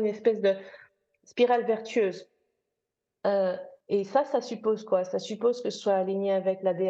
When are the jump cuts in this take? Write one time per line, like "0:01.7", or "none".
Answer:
0:03.8